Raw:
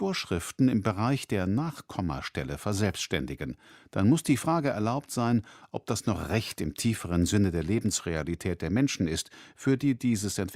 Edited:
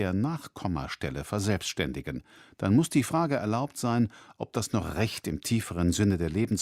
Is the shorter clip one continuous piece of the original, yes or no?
yes